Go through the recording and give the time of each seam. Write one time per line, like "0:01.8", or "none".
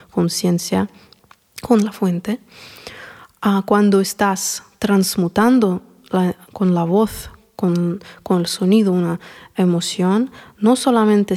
0:06.4